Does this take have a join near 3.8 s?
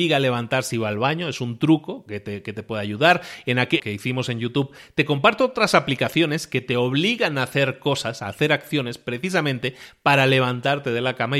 yes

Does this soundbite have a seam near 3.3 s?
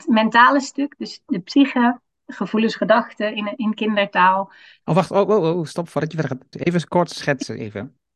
no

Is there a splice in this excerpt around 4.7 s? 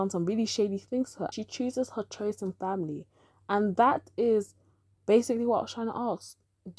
no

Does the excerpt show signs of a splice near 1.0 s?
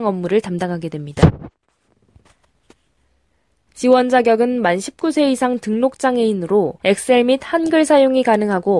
no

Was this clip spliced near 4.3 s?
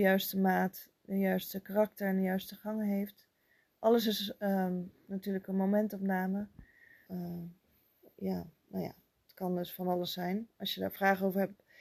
no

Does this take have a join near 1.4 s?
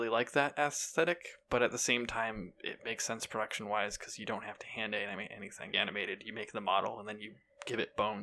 no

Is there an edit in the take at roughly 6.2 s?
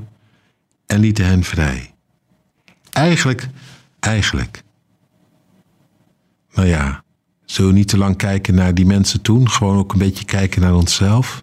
no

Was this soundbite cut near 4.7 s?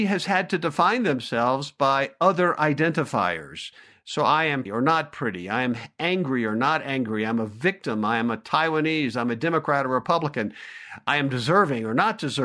yes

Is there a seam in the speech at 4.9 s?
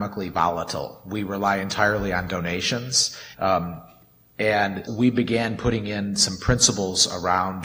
yes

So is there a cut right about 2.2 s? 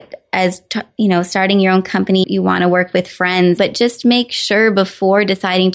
yes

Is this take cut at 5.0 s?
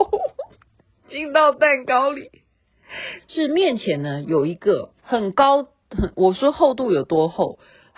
yes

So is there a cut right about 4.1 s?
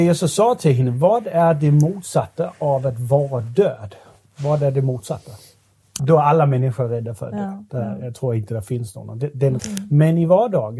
no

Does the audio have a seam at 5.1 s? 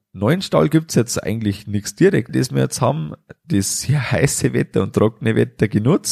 no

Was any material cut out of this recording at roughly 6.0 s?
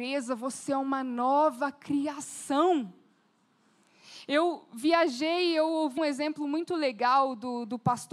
yes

